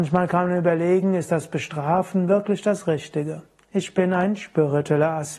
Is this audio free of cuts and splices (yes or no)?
no